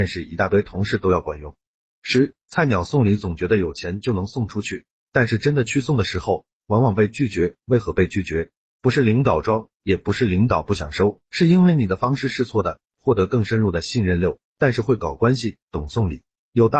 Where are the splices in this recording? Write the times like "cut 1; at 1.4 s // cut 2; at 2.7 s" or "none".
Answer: cut 1; at 12.9 s // cut 2; at 14.4 s